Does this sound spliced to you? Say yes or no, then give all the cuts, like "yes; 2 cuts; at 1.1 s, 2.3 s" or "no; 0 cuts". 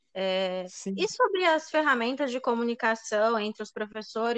no; 0 cuts